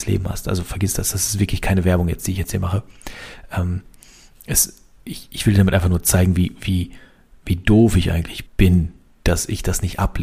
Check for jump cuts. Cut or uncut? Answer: cut